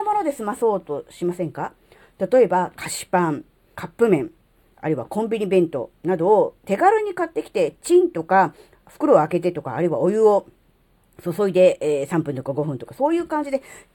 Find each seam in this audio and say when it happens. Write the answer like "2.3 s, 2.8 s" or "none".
3.7 s